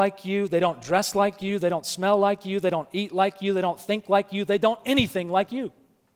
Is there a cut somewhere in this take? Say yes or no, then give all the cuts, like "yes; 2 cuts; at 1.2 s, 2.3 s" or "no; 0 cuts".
no; 0 cuts